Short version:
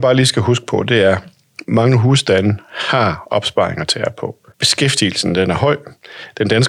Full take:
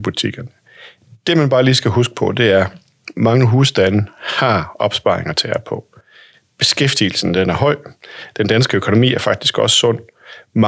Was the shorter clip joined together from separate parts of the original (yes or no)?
yes